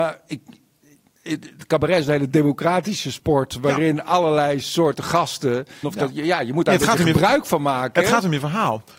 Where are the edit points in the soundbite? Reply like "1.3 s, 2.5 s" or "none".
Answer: 5.8 s

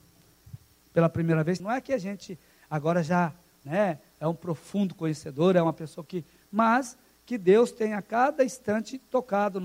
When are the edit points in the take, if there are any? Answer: 1.6 s

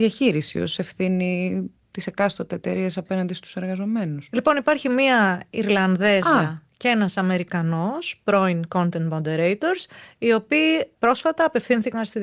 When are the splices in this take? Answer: none

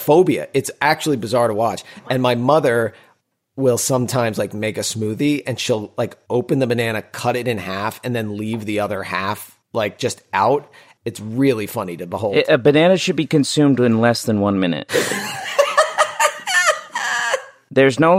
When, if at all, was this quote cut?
11.0 s

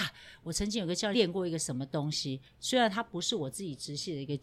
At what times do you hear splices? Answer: 1.1 s

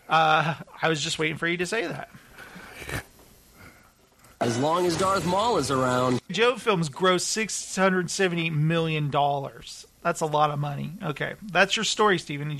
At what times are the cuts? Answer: 6.3 s

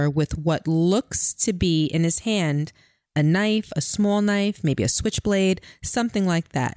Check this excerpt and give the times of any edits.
none

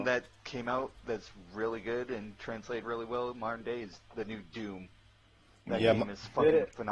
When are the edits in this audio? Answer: none

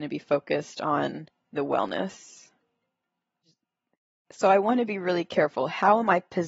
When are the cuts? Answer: none

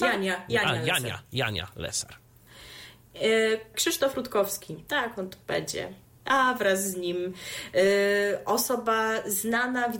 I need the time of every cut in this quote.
3.7 s

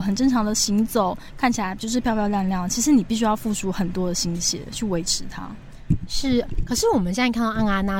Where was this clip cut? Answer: none

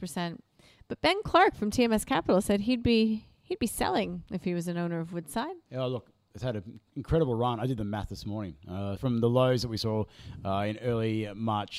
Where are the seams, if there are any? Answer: 5.7 s, 9.0 s

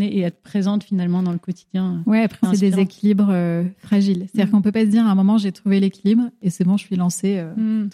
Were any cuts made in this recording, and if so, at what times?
2.4 s

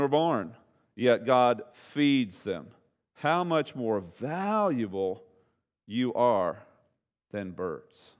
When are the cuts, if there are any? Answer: none

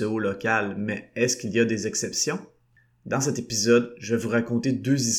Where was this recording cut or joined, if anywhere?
none

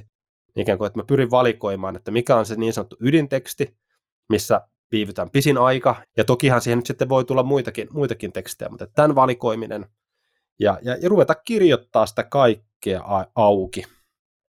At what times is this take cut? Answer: 6.0 s

